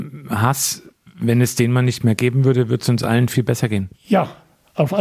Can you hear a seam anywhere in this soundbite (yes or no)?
no